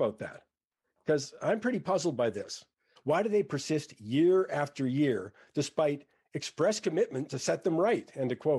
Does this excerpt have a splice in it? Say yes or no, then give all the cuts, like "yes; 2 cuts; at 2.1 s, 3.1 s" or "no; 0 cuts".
yes; 1 cut; at 3.0 s